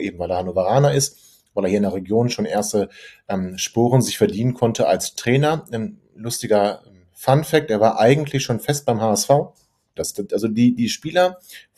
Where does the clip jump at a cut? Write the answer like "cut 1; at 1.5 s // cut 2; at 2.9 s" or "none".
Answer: cut 1; at 10.0 s